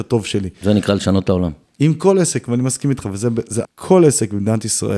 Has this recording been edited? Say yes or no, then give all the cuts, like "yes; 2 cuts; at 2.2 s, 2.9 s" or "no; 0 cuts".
yes; 2 cuts; at 1.6 s, 3.6 s